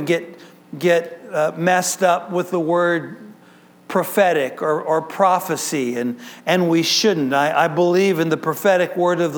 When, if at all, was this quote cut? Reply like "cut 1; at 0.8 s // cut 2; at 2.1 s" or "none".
none